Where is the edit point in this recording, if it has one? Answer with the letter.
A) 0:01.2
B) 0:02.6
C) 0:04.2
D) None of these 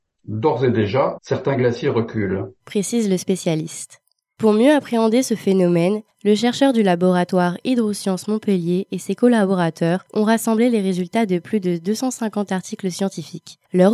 A